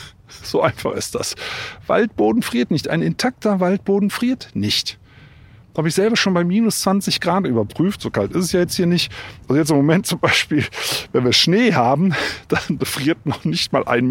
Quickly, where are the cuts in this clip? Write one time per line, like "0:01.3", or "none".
none